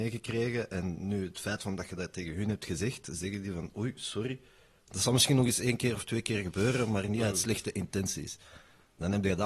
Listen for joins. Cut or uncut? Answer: uncut